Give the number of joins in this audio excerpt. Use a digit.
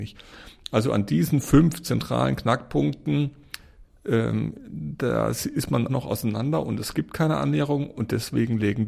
1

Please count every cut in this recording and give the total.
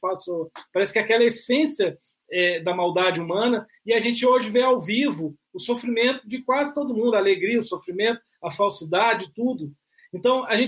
0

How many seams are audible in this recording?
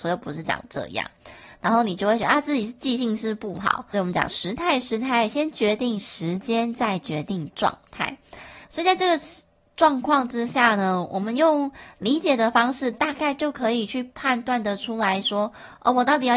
2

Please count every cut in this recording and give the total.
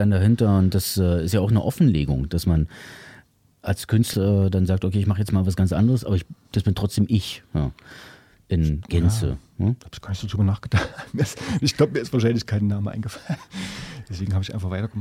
1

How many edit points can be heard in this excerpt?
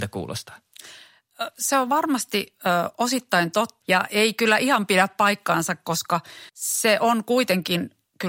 2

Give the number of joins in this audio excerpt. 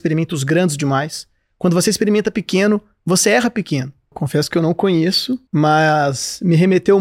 2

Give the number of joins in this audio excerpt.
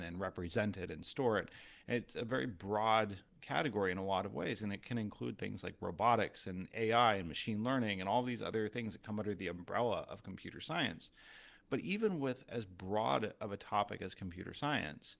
0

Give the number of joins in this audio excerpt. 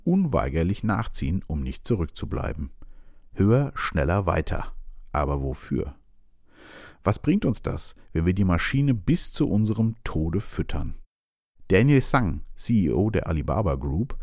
0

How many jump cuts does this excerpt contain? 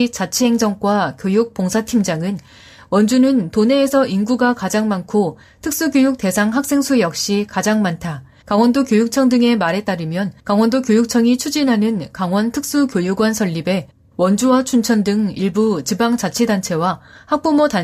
2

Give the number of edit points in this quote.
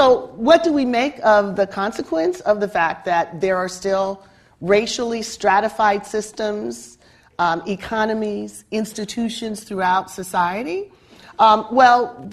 0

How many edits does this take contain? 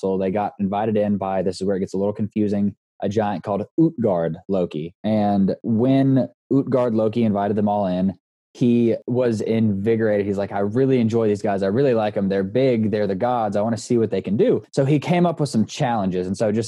1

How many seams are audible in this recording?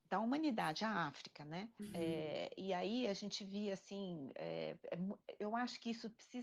1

